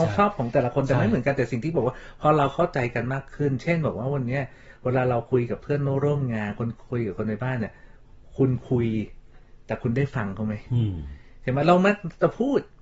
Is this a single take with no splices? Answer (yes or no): yes